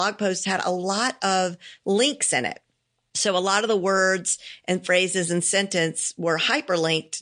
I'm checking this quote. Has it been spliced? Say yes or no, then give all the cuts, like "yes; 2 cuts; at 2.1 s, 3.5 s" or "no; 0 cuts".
no; 0 cuts